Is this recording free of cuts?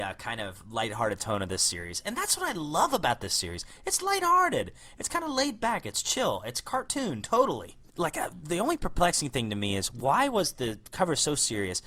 yes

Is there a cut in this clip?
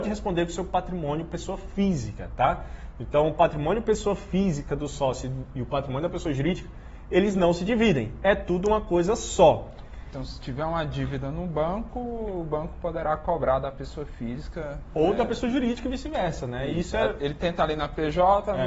no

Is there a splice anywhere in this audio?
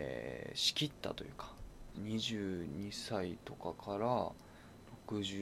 yes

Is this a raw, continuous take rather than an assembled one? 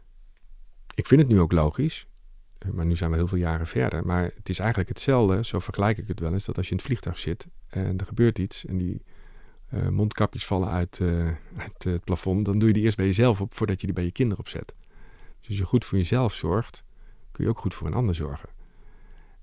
yes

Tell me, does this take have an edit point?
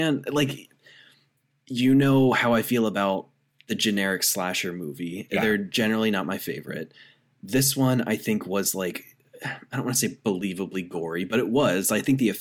no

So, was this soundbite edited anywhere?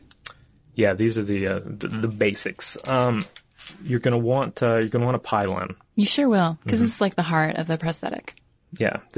no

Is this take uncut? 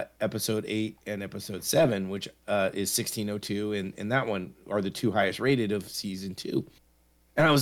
yes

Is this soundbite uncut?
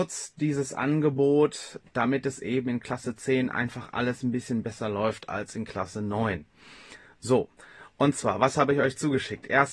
yes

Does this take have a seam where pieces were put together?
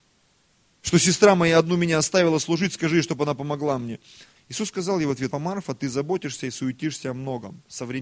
yes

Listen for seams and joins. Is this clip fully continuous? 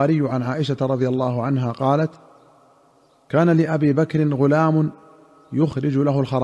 yes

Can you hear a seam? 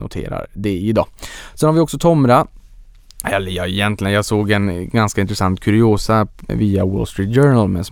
yes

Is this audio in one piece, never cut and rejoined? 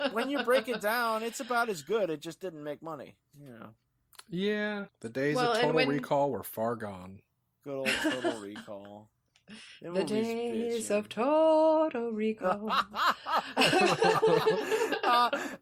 no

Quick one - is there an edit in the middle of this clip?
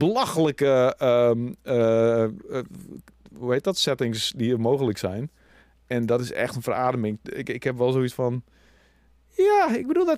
no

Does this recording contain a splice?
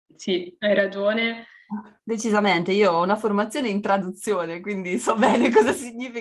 yes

